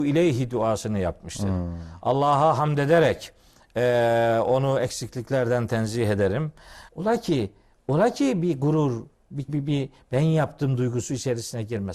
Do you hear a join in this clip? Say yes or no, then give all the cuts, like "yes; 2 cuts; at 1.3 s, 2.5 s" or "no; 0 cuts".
yes; 2 cuts; at 6.9 s, 9.5 s